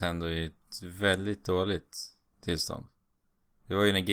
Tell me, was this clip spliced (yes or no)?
no